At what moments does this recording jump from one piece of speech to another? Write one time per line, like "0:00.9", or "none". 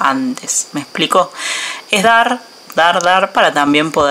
none